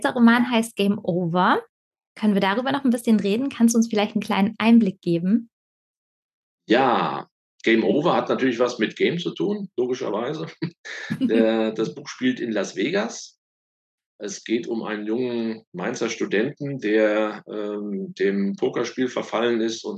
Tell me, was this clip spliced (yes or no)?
no